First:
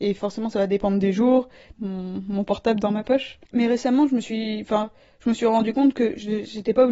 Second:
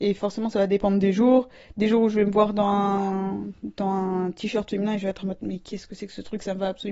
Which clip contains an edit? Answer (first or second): first